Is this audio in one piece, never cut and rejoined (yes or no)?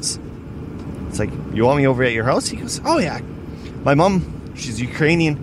yes